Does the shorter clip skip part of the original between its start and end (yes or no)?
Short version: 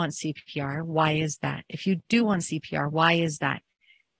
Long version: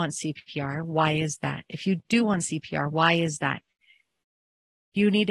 no